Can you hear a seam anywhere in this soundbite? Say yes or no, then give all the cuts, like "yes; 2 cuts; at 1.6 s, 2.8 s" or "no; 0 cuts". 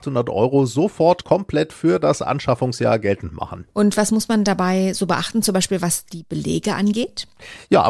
no; 0 cuts